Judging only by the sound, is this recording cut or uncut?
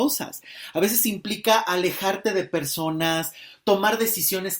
uncut